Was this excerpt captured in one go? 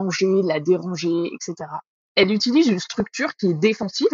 yes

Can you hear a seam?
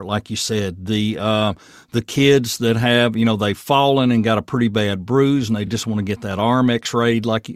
no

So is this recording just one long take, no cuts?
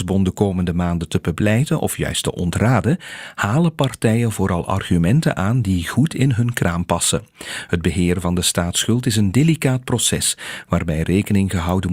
yes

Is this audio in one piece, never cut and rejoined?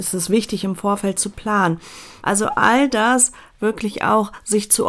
no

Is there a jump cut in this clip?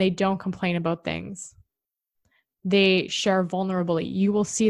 no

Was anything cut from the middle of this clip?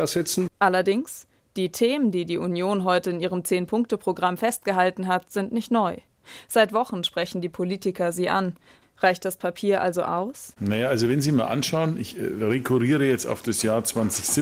no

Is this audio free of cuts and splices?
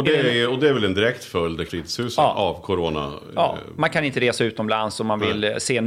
no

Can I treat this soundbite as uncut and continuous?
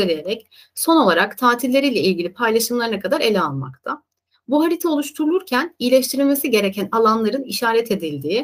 yes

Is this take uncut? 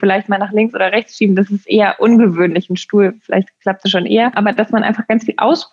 yes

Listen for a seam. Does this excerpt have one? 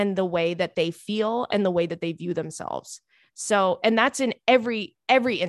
no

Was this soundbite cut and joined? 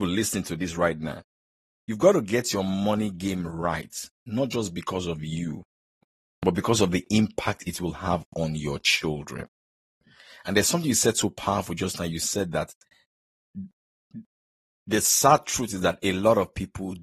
no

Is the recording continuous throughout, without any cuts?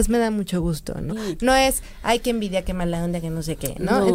no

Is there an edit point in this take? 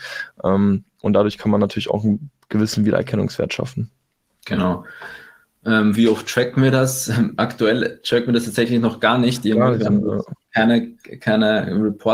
yes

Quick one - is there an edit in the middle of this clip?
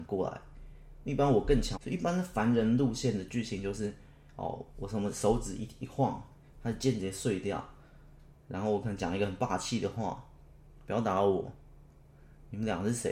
yes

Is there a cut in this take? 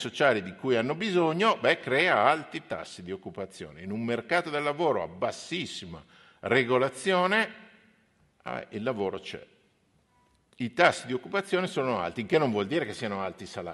no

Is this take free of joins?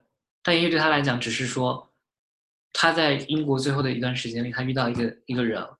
yes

